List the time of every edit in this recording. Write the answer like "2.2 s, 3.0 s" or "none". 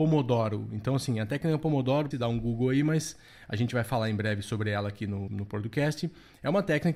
2.1 s, 5.3 s